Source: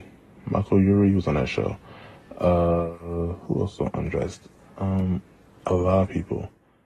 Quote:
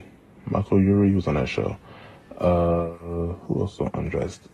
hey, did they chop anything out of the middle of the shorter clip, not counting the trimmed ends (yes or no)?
no